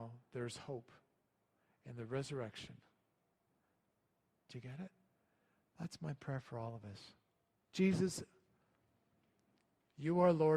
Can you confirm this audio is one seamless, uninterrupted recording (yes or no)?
no